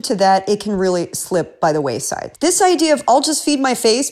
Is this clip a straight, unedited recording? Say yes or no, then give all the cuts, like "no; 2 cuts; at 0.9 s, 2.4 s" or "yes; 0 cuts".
no; 1 cut; at 2.3 s